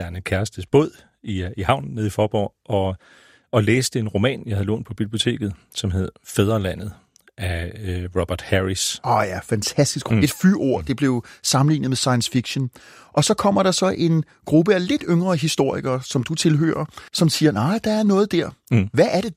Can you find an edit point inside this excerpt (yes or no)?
yes